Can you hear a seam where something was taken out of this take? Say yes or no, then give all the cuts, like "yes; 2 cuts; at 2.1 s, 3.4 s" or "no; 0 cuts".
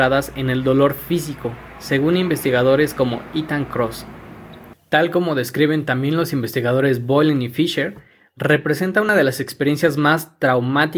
no; 0 cuts